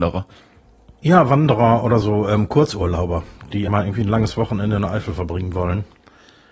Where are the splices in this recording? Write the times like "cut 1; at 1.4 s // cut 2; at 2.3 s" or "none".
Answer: cut 1; at 2.0 s // cut 2; at 3.7 s